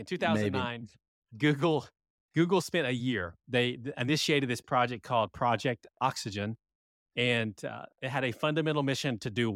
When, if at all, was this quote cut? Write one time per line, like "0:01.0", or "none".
none

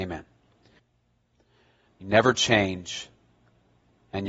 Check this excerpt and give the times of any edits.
0:01.9

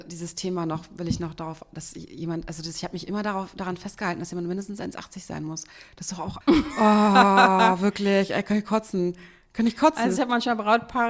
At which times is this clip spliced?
0:06.4

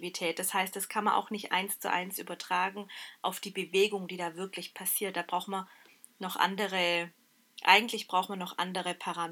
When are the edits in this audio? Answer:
none

